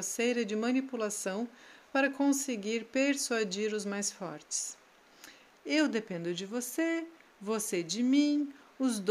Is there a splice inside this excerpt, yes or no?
yes